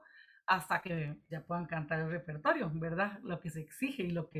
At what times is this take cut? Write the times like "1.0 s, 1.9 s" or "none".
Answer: 1.3 s